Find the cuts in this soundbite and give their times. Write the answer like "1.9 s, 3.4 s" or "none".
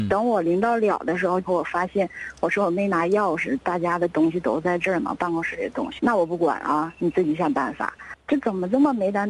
6.0 s, 8.1 s